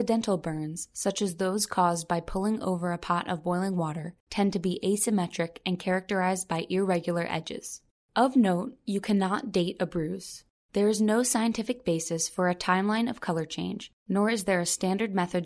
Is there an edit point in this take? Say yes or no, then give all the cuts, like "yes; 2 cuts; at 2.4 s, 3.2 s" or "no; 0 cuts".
yes; 1 cut; at 8.1 s